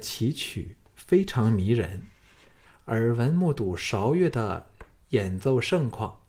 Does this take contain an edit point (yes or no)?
yes